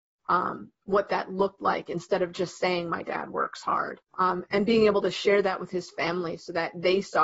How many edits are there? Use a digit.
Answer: 1